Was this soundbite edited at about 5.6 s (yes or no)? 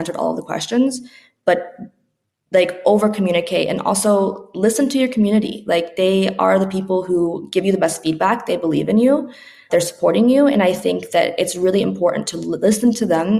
no